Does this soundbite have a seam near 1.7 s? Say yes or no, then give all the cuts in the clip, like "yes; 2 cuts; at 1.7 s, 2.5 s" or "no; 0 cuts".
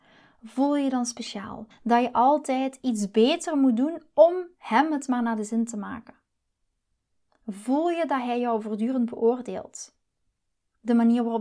yes; 1 cut; at 1.7 s